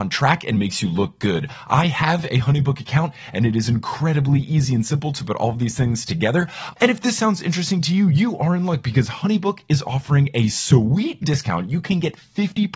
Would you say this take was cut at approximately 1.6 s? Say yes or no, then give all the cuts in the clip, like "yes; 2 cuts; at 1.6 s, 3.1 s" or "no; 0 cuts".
no; 1 cut; at 6.7 s